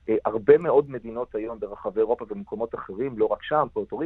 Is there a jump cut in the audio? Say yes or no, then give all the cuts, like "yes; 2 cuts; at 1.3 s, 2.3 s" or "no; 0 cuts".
no; 0 cuts